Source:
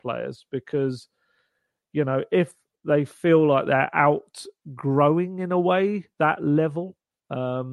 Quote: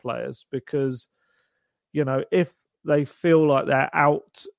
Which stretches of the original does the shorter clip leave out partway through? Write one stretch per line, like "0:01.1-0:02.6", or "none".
none